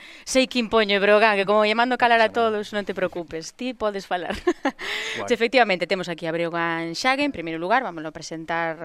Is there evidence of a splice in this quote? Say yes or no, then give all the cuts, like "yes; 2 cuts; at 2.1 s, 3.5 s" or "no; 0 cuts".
yes; 1 cut; at 5.3 s